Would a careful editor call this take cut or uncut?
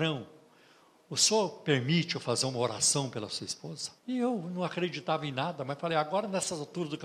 cut